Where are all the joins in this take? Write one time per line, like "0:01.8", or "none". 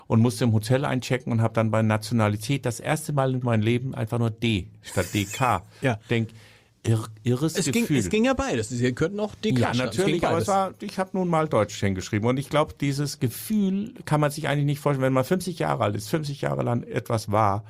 none

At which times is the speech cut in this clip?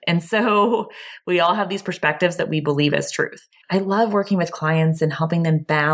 0:03.6

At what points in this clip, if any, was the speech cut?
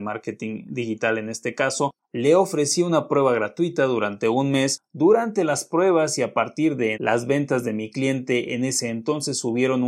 0:06.9

